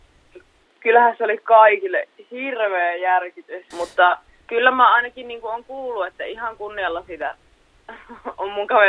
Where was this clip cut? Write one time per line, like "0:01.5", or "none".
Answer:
0:03.7